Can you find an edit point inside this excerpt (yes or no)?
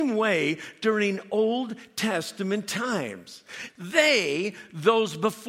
yes